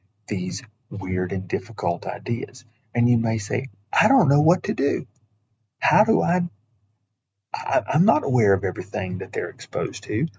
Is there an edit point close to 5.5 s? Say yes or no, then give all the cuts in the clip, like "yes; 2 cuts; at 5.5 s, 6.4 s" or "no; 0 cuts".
no; 0 cuts